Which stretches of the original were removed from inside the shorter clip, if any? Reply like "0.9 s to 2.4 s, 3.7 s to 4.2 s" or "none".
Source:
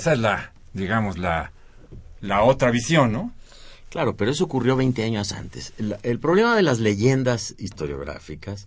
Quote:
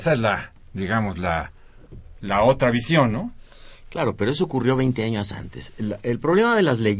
none